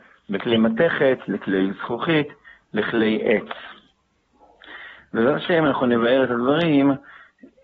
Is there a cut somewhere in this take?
no; 0 cuts

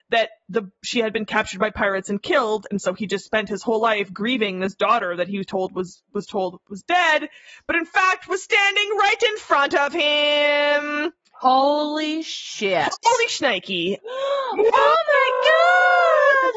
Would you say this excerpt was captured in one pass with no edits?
no; 1 cut; at 14.0 s

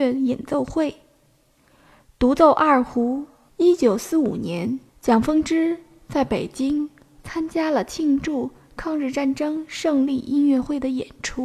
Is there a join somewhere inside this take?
yes; 2 cuts; at 3.5 s, 4.9 s

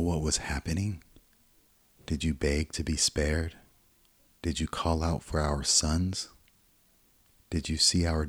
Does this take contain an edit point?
yes; 1 cut; at 4.3 s

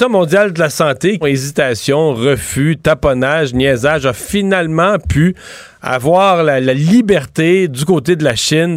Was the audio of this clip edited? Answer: yes; 1 cut; at 1.2 s

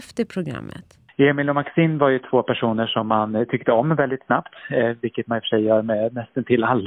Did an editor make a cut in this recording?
no; 0 cuts

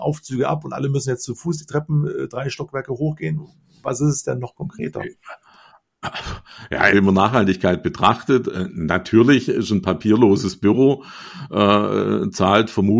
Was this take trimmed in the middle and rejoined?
yes; 1 cut; at 6.9 s

